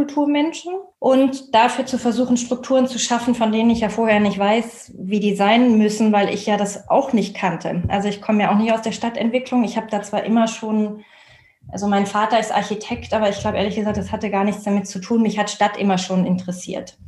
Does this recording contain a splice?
yes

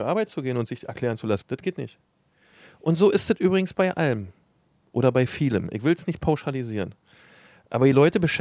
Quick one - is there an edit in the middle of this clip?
yes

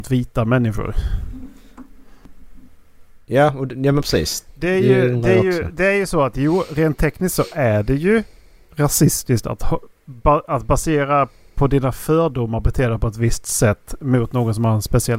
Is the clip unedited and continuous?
yes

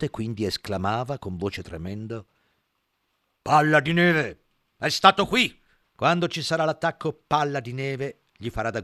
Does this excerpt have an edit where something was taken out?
yes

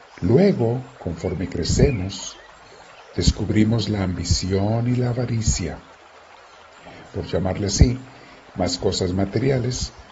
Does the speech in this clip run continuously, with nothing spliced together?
no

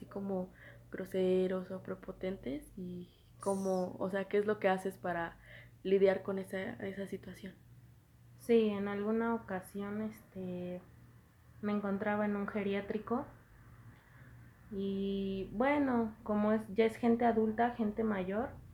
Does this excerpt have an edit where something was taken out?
no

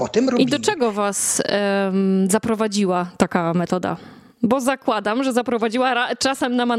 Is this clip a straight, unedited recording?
yes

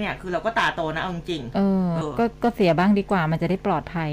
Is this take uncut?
no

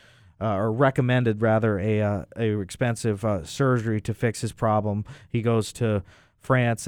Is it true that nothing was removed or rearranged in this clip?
yes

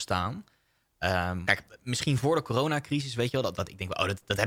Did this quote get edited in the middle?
yes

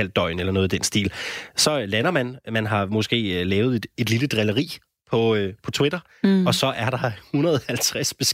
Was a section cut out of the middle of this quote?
no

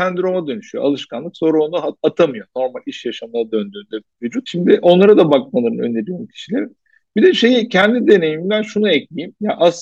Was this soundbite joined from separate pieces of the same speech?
no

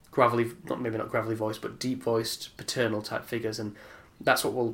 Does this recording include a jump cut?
no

